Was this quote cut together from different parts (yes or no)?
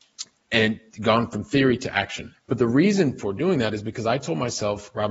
yes